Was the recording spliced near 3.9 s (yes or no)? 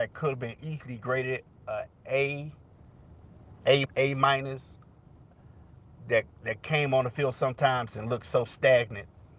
yes